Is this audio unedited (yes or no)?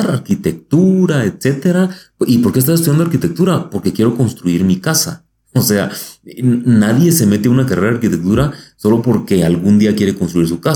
yes